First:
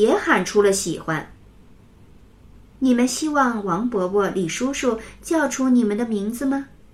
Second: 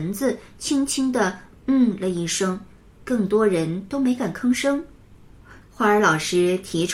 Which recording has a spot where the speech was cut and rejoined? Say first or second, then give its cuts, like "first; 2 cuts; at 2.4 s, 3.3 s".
second; 1 cut; at 5.6 s